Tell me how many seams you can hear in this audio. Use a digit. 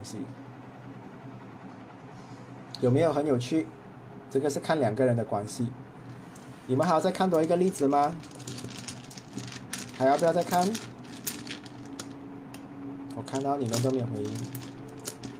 0